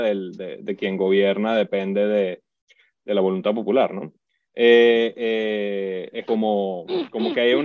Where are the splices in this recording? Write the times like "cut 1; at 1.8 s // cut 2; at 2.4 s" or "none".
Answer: cut 1; at 6.3 s